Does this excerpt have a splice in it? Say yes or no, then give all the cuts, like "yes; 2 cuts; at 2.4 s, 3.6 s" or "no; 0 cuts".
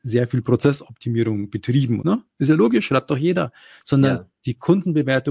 yes; 1 cut; at 2.0 s